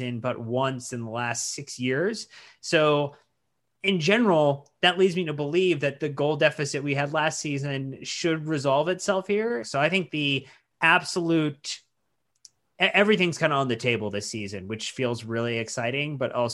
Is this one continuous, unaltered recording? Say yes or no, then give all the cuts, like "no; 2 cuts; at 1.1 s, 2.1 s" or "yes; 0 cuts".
no; 1 cut; at 9.6 s